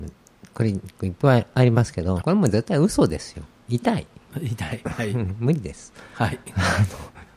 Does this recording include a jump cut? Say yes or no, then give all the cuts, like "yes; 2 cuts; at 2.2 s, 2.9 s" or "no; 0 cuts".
yes; 1 cut; at 2.2 s